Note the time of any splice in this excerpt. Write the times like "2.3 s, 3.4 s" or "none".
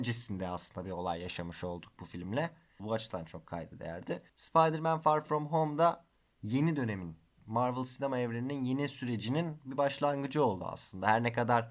2.8 s, 4.3 s